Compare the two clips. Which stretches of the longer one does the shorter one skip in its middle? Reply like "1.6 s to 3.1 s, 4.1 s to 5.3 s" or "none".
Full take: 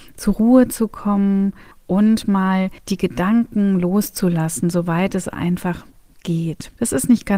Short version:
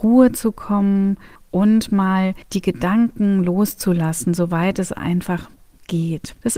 none

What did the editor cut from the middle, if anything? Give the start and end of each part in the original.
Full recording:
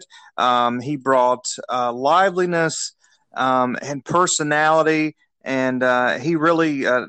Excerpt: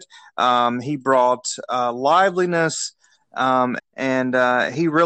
3.8 s to 5.3 s

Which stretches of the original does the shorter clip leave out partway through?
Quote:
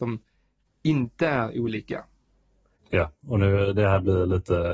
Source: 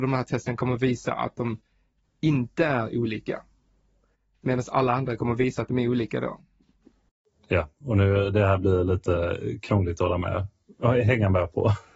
4.2 s to 7.4 s

